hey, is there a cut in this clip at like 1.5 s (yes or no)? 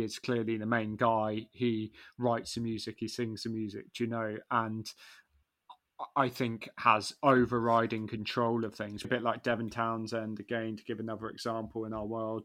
no